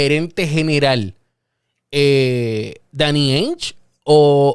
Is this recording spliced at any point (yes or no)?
no